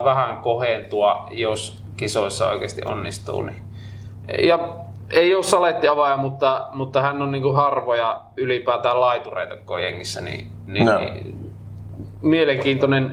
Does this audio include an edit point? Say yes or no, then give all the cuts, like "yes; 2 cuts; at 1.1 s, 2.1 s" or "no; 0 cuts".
no; 0 cuts